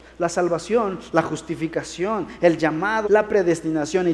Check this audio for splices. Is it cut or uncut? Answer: cut